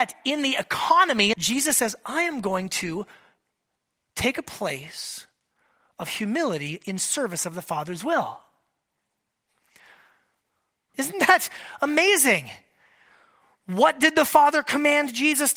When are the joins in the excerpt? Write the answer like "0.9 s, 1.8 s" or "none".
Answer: 1.3 s, 10.9 s

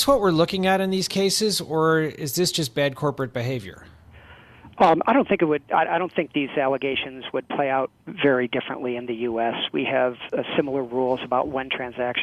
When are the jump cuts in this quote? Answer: none

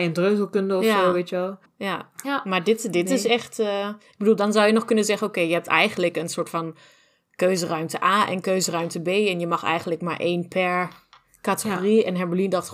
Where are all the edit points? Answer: 1.6 s

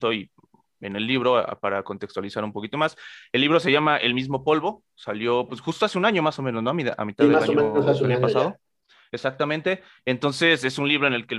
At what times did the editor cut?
none

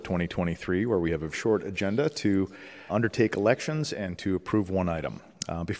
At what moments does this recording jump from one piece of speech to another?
1.3 s, 2.9 s

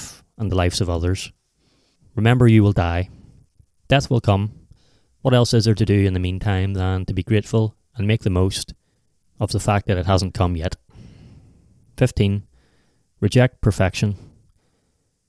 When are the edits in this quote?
2.0 s, 9.3 s

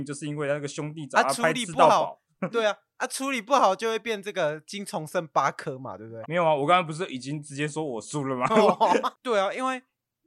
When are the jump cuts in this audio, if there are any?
6.2 s, 9.1 s

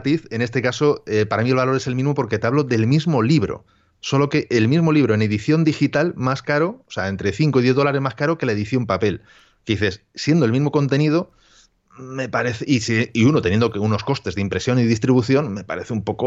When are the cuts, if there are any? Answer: none

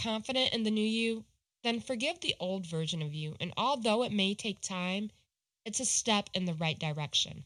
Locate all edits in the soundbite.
none

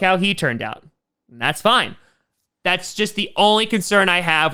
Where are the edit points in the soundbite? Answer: none

